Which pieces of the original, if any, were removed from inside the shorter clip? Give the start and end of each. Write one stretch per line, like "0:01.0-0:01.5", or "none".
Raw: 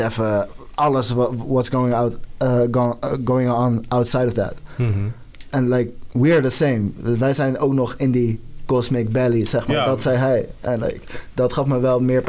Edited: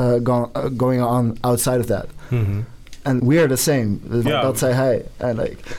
0:05.7-0:06.1
0:07.2-0:09.7

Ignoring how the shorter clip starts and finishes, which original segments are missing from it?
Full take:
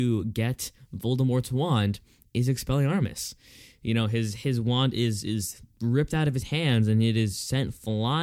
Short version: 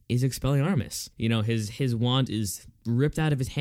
0:03.4-0:03.8
0:04.9-0:05.2

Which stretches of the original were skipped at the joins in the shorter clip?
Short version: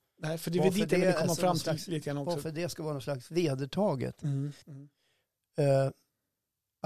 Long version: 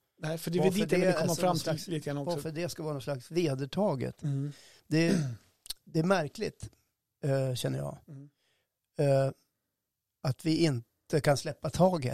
0:04.6-0:08.0

